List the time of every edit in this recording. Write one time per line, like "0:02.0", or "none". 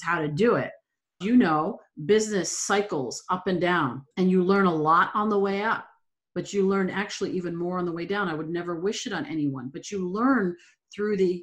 0:01.2
0:04.1